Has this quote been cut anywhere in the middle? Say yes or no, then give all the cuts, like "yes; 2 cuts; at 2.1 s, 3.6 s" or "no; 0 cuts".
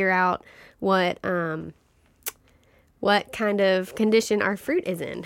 no; 0 cuts